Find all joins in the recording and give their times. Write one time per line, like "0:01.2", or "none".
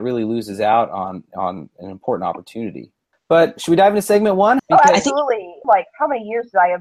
0:03.1
0:04.6
0:05.6

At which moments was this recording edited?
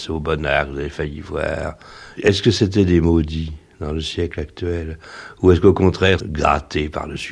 0:02.2
0:06.2

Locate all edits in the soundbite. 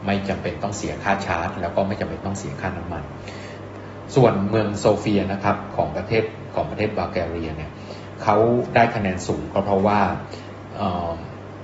0:08.2

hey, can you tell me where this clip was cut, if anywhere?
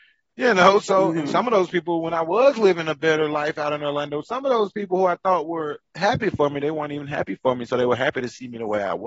none

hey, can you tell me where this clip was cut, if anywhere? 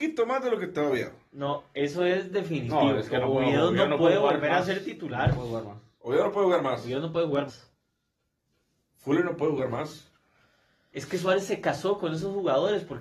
0:07.5
0:10.9

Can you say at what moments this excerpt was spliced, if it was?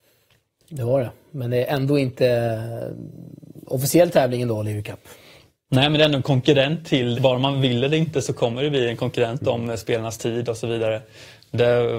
0:07.1

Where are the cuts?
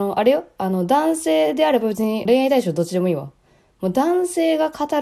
0:02.3

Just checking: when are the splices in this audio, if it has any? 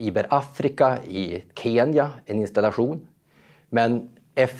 none

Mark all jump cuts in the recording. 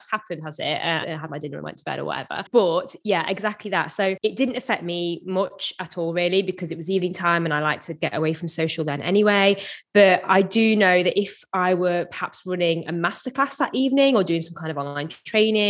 0:01.0

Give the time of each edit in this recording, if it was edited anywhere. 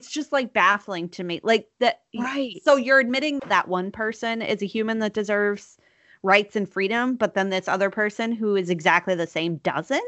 0:02.1
0:03.4

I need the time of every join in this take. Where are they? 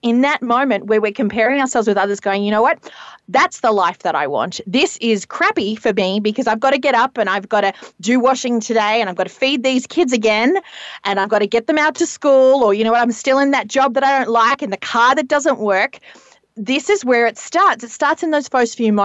none

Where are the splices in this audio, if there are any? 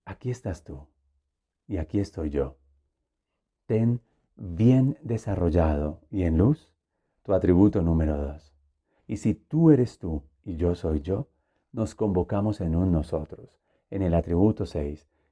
0:09.0

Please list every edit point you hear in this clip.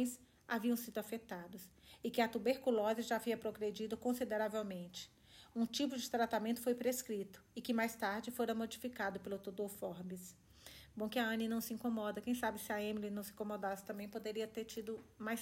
none

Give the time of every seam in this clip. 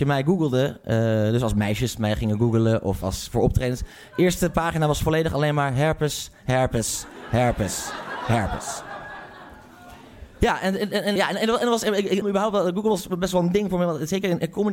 0:11.2
0:12.2

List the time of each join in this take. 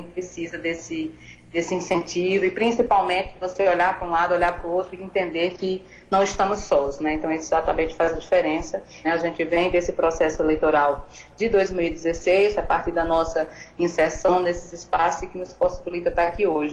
0:09.0
0:12.6

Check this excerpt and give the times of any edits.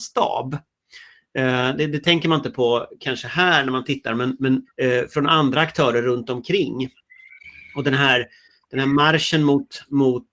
0:04.6

